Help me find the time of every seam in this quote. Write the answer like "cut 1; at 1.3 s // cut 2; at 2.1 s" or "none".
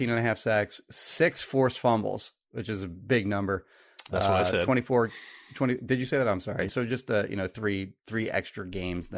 cut 1; at 6.7 s

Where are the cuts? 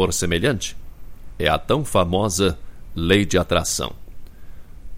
none

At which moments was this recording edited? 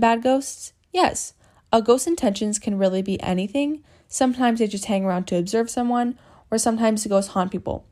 none

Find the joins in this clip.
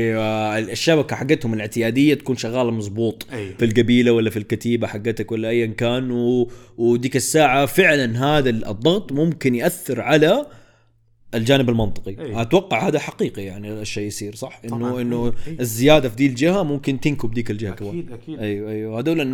cut 1; at 3.6 s

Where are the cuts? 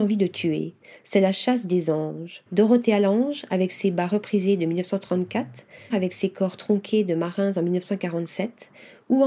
cut 1; at 2.5 s // cut 2; at 5.9 s

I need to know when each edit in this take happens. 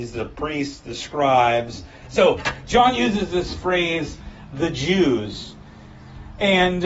cut 1; at 2.0 s // cut 2; at 4.5 s

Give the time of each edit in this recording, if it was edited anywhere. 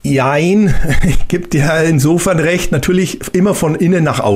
none

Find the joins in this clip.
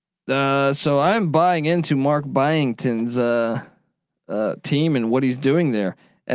none

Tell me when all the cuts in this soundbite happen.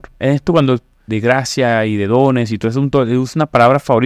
cut 1; at 1.1 s

